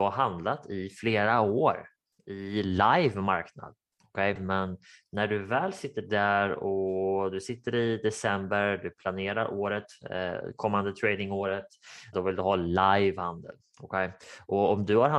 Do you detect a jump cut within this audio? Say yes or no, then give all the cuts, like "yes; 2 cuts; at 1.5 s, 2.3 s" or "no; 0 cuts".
yes; 2 cuts; at 4.4 s, 12.1 s